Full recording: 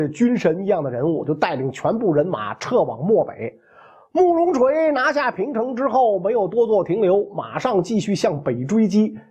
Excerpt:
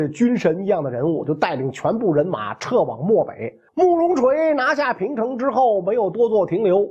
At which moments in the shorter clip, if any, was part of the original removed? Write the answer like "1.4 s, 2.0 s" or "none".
3.7 s